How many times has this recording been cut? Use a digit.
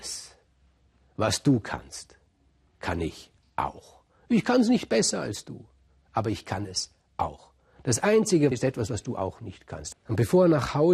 2